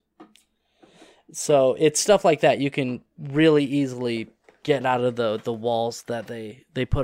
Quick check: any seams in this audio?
no; 0 cuts

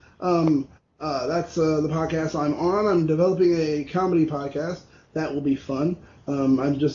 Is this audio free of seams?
yes; 0 cuts

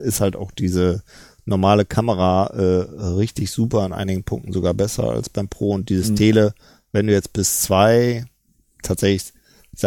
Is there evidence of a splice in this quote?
no; 0 cuts

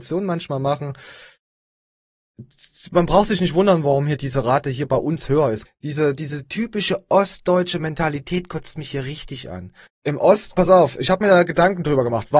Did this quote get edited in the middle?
yes; 2 cuts; at 5.6 s, 9.9 s

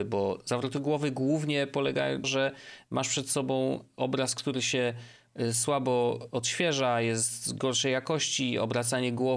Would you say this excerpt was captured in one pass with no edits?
no; 1 cut; at 2.2 s

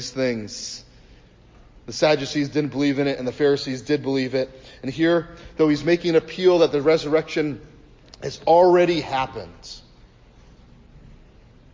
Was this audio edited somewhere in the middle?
no; 0 cuts

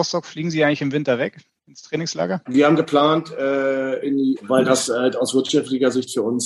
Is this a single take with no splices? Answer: no; 2 cuts; at 2.5 s, 4.4 s

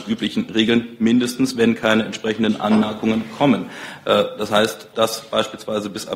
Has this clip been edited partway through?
yes; 1 cut; at 4.9 s

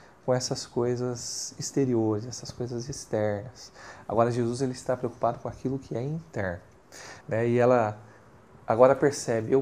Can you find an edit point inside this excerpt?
yes; 1 cut; at 7.2 s

